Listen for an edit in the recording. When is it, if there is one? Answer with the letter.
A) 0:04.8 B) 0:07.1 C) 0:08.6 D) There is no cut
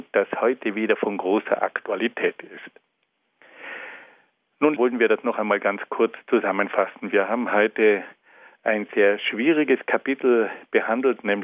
A